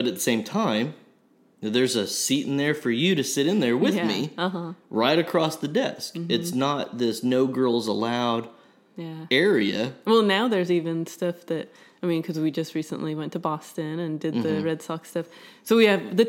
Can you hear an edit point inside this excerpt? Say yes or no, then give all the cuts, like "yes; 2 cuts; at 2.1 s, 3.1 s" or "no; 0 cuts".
no; 0 cuts